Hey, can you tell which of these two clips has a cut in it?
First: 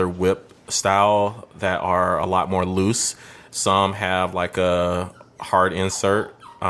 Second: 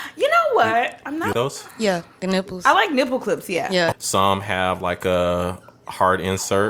second; 2 cuts; at 1.3 s, 3.9 s

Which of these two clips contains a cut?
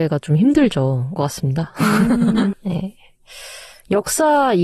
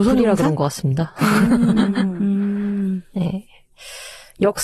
first; 2 cuts; at 1.2 s, 2.5 s

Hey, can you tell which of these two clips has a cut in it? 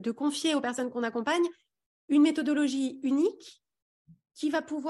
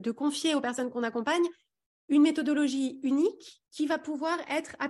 second; 1 cut; at 3.7 s

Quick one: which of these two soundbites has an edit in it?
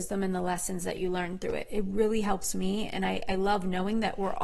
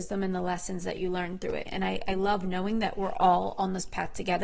second; 1 cut; at 1.7 s

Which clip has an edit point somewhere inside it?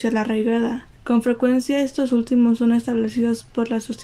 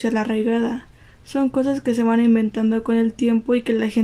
first; 1 cut; at 0.9 s

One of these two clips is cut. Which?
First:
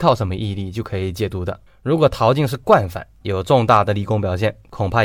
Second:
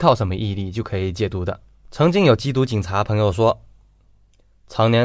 first; 2 cuts; at 1.7 s, 3.2 s

